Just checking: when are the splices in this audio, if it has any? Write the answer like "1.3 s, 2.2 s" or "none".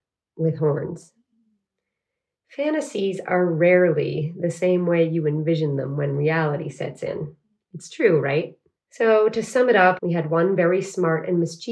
8.8 s, 10.0 s